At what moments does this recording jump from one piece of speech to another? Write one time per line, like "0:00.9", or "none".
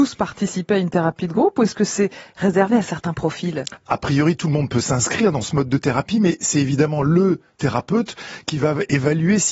0:03.8